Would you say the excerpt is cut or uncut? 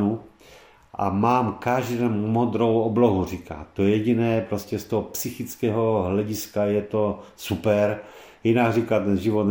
uncut